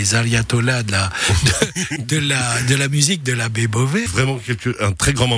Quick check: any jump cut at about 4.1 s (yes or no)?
yes